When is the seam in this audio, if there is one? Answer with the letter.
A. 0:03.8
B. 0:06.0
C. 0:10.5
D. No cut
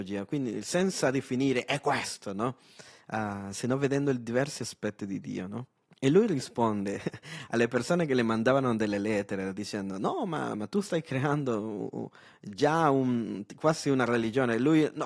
D